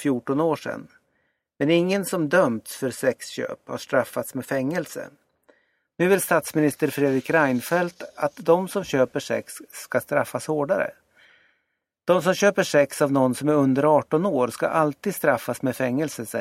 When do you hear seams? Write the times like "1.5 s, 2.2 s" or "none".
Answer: 5.9 s